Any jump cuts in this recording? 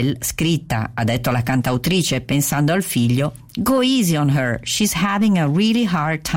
no; 0 cuts

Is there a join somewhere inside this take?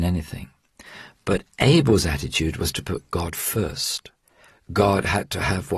yes; 1 cut; at 4.7 s

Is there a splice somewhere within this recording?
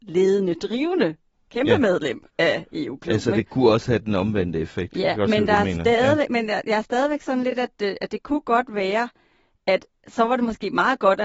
no; 0 cuts

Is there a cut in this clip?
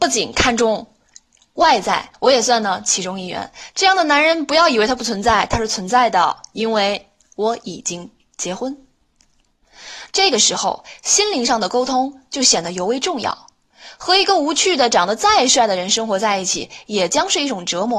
yes; 3 cuts; at 2.1 s, 3.7 s, 10.1 s

